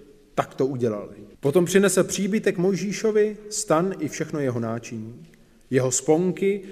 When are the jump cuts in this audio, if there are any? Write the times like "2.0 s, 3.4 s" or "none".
1.3 s